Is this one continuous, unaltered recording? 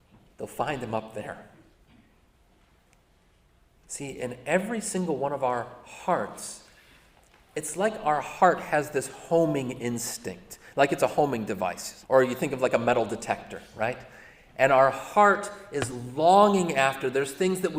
no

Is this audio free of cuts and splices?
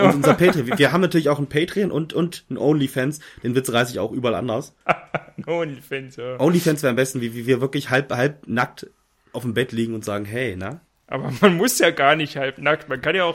yes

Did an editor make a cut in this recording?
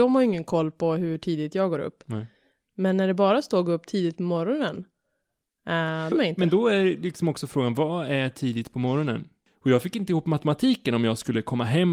yes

